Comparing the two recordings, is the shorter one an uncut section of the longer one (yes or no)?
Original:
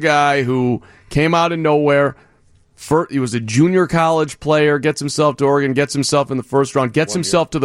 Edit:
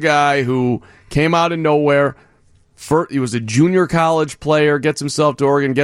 yes